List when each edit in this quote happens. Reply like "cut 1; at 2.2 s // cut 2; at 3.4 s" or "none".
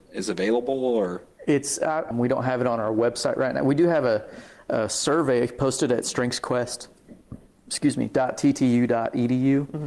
cut 1; at 2.1 s